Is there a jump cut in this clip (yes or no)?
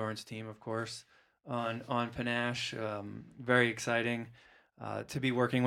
no